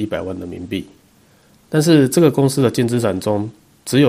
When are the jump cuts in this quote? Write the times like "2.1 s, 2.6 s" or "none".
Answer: 1.5 s